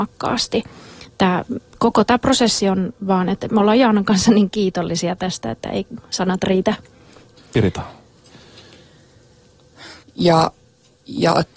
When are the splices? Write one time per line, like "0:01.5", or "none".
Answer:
0:07.4
0:10.0